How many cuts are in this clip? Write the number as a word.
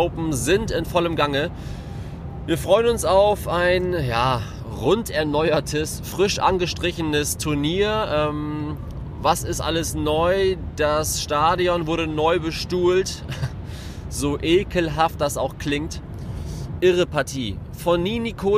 one